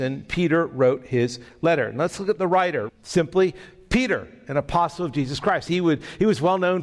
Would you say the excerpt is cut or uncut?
cut